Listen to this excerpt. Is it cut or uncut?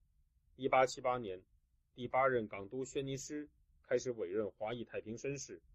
uncut